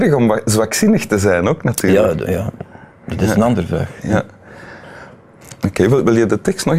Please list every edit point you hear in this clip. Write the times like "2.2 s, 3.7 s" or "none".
none